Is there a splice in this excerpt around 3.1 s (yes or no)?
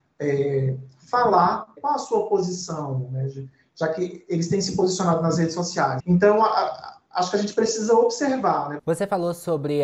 no